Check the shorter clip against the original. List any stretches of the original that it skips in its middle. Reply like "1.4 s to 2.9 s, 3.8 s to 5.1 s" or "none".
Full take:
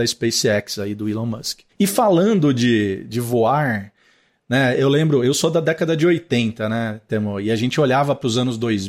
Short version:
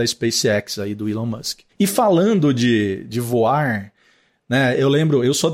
none